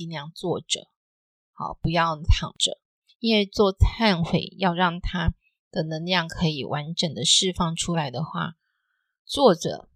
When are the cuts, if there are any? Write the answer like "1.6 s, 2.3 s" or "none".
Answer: none